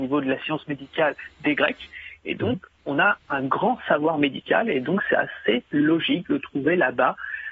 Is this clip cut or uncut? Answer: uncut